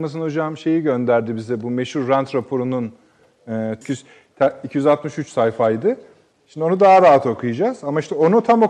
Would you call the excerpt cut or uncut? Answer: cut